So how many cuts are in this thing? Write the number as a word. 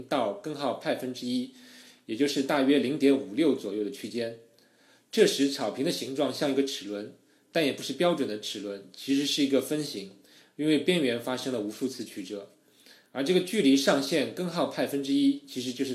zero